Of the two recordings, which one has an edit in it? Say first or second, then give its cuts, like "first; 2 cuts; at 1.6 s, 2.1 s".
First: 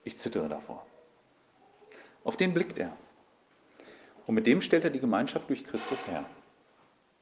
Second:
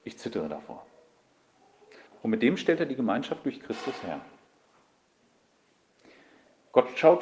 second; 1 cut; at 2.1 s